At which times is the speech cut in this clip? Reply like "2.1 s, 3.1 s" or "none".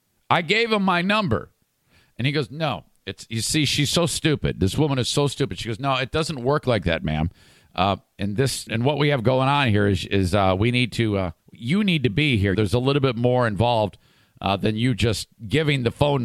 8.7 s, 11.4 s, 12.5 s